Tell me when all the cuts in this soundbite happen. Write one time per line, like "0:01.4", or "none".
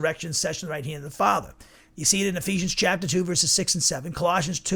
0:01.8